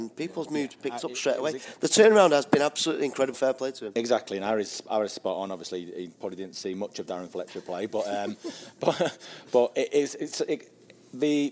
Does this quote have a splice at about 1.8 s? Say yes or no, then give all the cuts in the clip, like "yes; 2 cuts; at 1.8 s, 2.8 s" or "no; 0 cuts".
no; 1 cut; at 3.3 s